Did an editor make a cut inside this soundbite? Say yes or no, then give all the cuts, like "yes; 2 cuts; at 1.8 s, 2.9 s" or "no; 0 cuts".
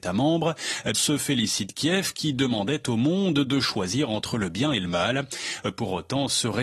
yes; 1 cut; at 0.9 s